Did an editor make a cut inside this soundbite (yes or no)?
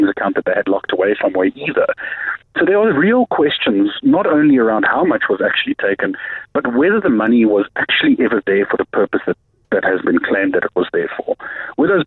yes